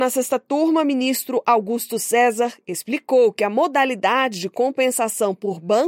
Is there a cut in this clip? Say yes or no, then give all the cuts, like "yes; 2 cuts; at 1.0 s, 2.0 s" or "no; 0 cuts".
no; 0 cuts